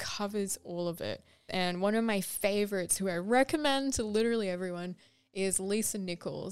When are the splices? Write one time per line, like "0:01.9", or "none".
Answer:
0:01.5